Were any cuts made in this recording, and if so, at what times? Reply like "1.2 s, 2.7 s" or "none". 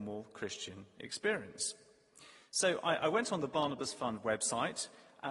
none

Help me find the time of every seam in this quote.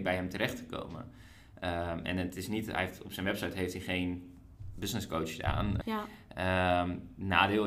5.8 s

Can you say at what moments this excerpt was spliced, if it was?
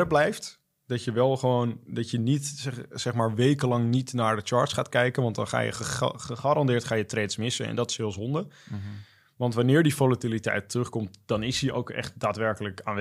none

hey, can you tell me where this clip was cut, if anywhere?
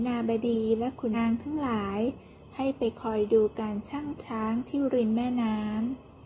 1.1 s

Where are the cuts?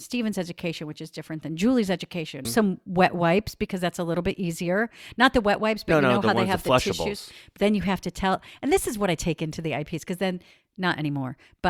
2.4 s

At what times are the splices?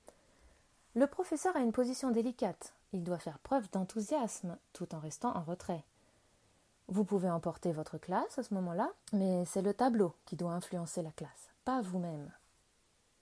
9.0 s

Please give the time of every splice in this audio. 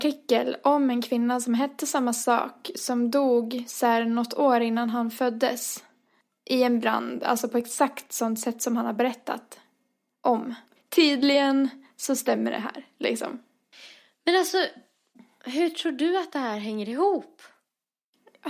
10.8 s

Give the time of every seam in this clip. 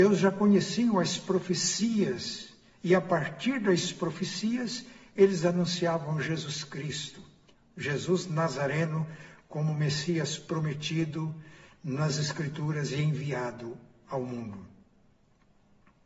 none

